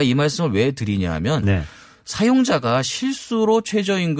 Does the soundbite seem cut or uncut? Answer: uncut